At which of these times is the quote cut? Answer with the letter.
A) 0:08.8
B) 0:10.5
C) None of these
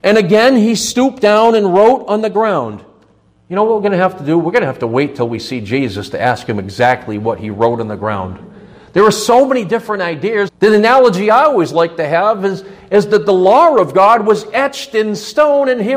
B